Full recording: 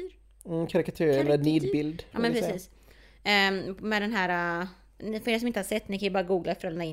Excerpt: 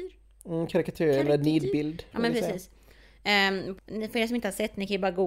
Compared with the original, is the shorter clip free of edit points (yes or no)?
no